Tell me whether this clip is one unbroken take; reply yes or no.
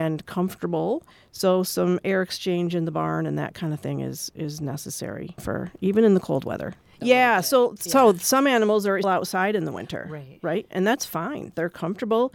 no